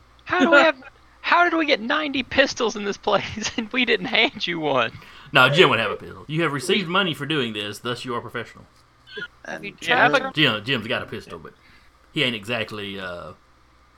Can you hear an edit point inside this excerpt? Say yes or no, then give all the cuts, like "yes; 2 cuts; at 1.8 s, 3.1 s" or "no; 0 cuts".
yes; 3 cuts; at 6.3 s, 9.3 s, 10.3 s